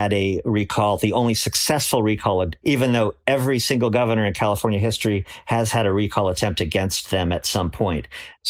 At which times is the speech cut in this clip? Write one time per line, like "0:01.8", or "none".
0:02.6